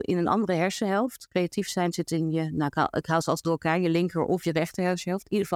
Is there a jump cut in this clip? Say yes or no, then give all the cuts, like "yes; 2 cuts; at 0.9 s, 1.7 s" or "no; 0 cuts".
no; 0 cuts